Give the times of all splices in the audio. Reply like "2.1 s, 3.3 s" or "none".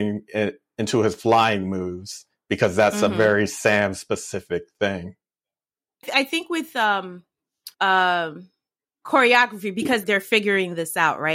6.0 s, 7.7 s, 10.0 s